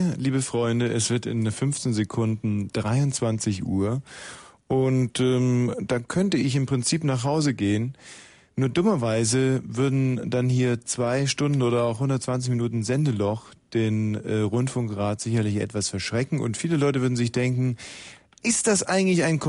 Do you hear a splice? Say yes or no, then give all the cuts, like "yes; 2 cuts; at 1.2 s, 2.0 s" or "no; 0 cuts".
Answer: no; 0 cuts